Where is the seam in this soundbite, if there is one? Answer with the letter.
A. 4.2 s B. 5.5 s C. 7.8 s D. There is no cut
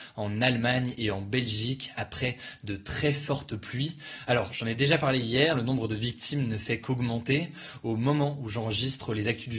B